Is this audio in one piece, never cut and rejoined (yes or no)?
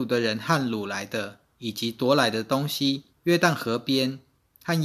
no